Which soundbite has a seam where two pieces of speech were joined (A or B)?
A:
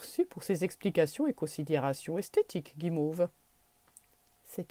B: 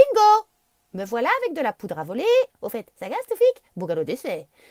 B